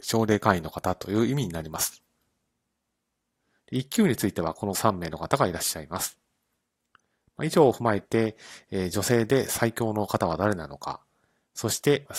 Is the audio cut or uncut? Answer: cut